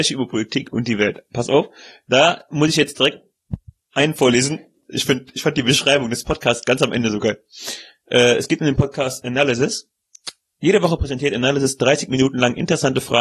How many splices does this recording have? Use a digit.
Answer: 0